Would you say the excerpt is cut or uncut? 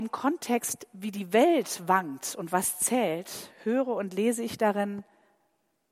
uncut